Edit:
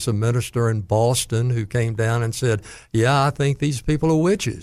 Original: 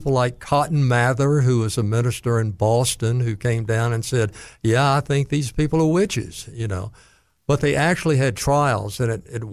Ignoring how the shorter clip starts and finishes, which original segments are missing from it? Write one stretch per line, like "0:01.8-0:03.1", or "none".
none